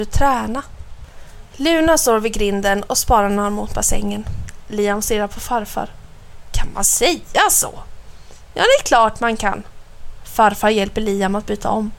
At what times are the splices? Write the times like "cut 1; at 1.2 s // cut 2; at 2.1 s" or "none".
cut 1; at 4.6 s